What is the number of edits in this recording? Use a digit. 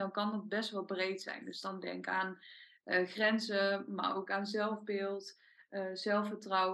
0